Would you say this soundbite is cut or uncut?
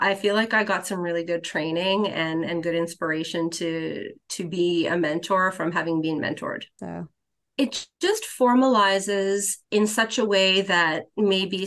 cut